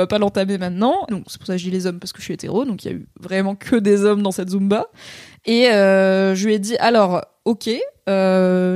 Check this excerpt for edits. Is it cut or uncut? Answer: cut